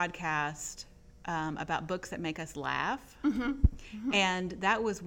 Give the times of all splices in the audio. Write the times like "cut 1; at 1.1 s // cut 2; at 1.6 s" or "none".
none